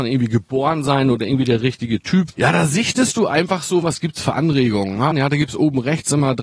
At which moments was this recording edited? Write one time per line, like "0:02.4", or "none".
0:02.3
0:03.8
0:05.1